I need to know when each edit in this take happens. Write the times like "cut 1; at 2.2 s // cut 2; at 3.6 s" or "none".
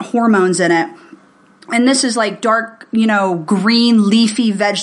none